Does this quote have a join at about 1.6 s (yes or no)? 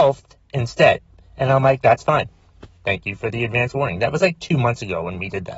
no